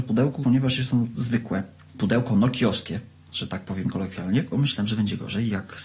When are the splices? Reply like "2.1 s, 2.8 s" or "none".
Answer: 4.5 s